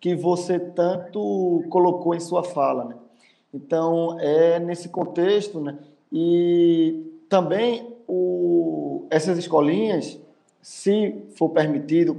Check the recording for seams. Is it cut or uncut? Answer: uncut